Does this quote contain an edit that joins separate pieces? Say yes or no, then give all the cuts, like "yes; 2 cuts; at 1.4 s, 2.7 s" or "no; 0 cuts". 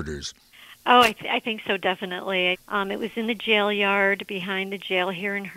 yes; 1 cut; at 2.5 s